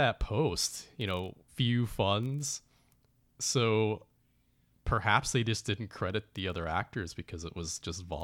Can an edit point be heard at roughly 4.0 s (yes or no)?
no